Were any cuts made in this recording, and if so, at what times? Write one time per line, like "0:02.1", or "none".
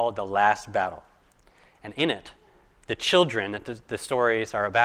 none